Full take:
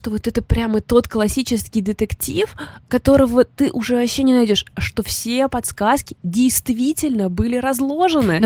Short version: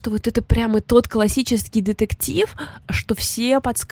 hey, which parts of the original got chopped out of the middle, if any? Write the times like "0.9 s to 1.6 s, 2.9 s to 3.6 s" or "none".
2.8 s to 4.7 s